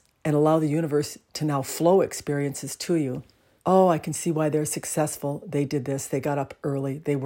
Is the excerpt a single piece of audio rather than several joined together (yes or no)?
no